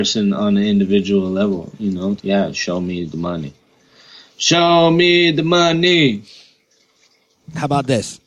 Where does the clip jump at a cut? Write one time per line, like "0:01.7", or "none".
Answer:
0:02.2